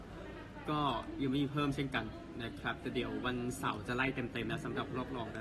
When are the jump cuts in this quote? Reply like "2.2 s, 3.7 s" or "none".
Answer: none